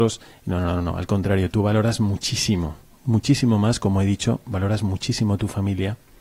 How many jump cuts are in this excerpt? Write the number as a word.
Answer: zero